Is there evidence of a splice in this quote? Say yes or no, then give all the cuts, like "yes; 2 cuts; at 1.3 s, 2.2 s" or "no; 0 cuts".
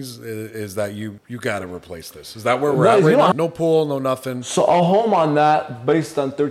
yes; 2 cuts; at 1.2 s, 3.3 s